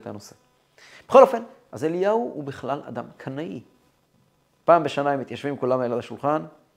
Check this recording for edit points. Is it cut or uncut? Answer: cut